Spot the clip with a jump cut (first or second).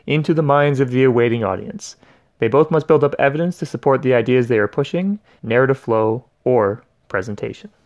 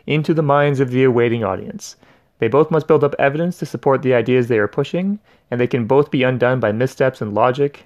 first